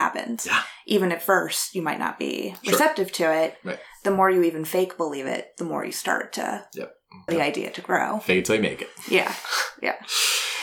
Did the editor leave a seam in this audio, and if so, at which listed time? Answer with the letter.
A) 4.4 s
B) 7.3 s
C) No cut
B